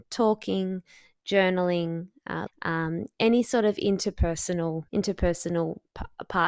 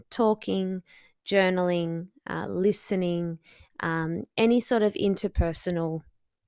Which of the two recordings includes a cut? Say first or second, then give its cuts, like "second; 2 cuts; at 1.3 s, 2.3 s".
first; 2 cuts; at 2.5 s, 4.9 s